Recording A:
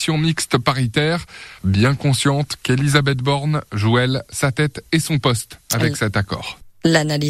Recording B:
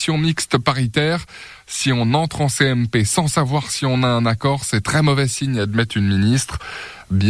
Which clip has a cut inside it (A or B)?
A